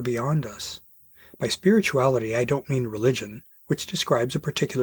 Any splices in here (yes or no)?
no